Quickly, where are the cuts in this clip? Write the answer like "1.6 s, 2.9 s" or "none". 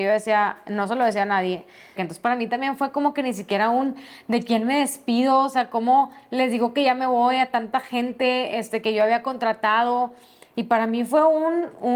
2.0 s